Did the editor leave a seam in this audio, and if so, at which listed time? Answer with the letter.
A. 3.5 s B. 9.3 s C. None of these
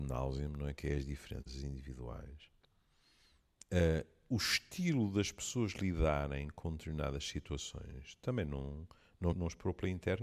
B